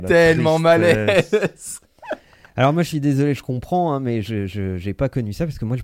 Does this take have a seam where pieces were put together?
no; 0 cuts

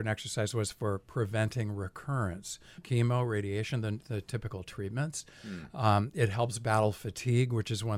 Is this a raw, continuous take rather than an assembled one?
no; 1 cut; at 2.8 s

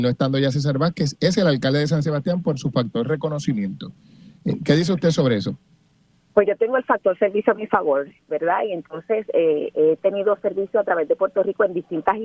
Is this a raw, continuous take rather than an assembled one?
yes; 0 cuts

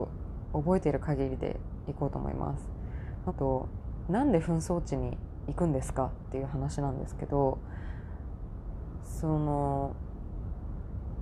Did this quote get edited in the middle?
yes; 1 cut; at 3.3 s

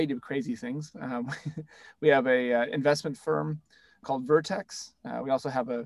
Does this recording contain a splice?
no; 0 cuts

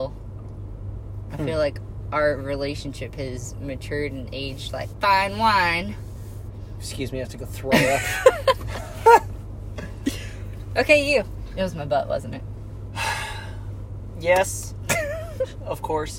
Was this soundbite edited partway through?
no; 0 cuts

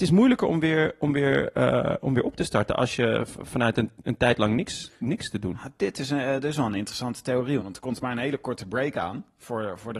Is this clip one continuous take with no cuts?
no; 1 cut; at 7.6 s

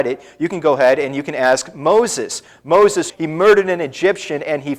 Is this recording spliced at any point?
yes; 1 cut; at 3.1 s

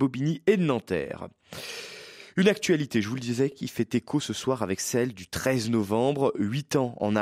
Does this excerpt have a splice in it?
no; 0 cuts

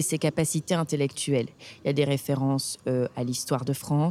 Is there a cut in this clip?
no; 0 cuts

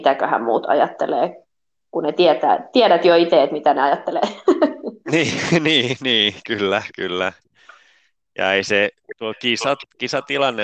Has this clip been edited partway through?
no; 0 cuts

